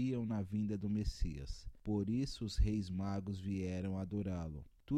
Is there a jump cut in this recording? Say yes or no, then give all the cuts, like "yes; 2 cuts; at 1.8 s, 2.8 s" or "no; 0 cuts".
no; 0 cuts